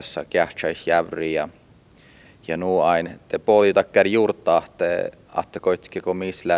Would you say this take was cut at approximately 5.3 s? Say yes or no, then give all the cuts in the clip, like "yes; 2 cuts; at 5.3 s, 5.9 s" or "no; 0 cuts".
no; 0 cuts